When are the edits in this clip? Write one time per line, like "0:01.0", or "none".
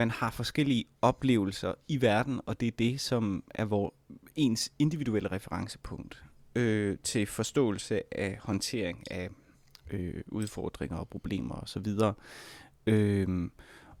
none

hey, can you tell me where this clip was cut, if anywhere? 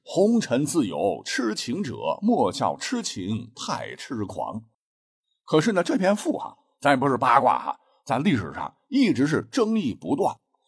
none

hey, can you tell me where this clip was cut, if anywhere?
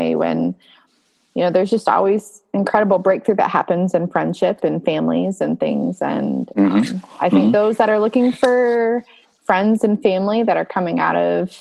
none

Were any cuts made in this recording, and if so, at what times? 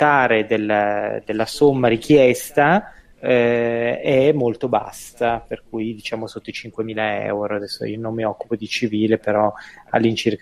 none

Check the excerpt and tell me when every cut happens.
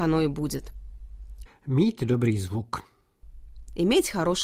0:01.5

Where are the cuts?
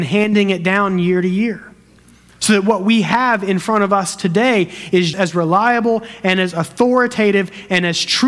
0:05.1

